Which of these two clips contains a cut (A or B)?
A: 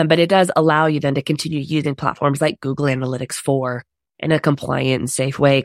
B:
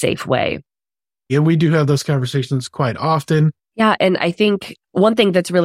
B